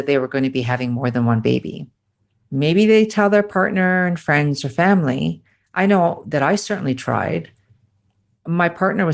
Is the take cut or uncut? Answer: cut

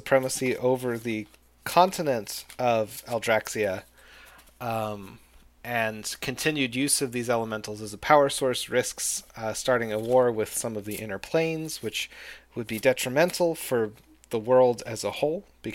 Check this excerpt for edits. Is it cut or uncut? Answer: uncut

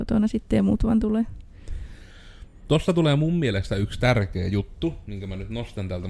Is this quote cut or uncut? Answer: uncut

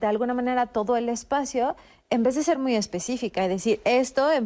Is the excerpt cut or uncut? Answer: uncut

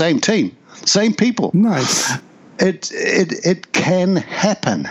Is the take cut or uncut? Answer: uncut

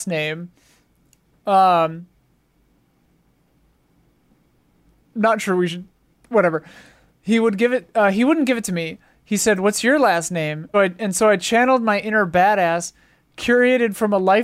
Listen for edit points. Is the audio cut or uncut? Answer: cut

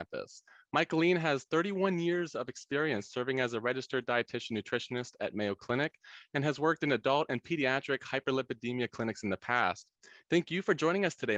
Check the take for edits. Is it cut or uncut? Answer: uncut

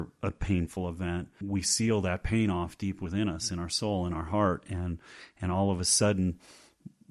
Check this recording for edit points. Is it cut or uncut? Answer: cut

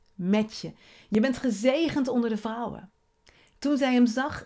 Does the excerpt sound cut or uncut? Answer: uncut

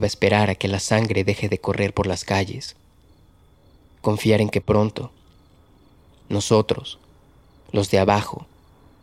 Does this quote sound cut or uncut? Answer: uncut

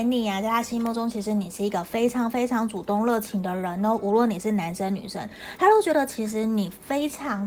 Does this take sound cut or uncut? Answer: uncut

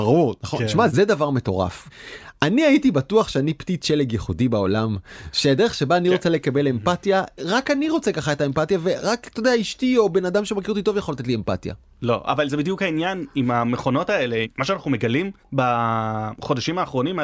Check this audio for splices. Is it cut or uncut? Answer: uncut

